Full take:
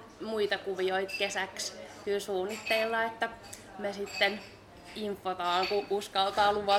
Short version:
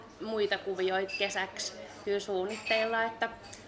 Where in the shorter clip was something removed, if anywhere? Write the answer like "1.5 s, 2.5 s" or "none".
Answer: none